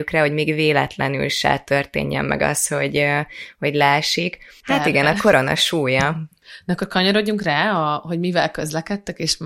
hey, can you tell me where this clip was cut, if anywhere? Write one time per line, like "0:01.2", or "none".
0:04.6